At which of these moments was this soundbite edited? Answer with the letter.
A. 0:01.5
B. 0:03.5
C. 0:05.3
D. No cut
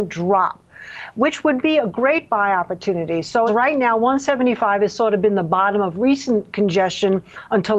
B